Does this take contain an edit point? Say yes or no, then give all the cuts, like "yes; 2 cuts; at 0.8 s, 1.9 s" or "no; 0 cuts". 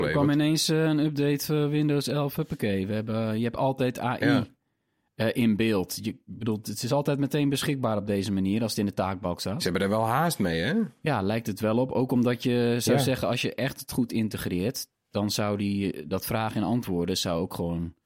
no; 0 cuts